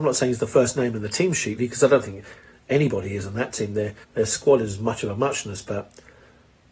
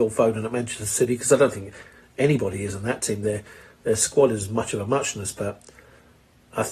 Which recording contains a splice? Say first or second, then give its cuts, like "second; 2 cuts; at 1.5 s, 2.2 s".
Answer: first; 2 cuts; at 1.6 s, 4.0 s